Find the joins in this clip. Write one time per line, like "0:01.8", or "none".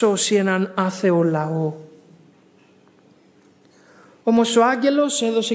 none